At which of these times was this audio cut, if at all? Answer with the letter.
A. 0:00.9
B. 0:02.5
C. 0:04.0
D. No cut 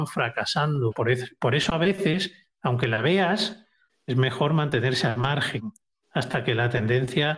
A